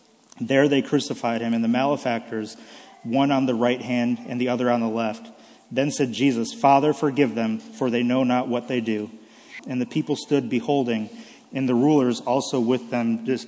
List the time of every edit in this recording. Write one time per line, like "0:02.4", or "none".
0:09.6